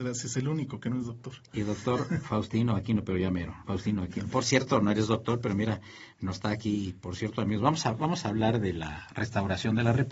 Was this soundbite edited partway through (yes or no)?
no